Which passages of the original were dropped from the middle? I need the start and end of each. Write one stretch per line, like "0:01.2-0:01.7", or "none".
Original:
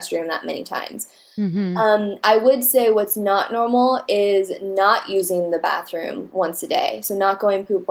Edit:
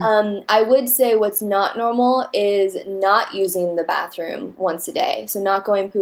none